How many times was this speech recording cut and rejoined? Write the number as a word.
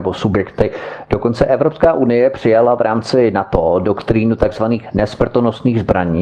zero